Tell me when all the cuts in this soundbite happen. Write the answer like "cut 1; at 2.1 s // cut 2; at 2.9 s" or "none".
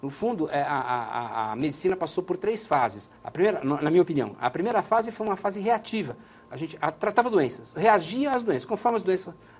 cut 1; at 3.2 s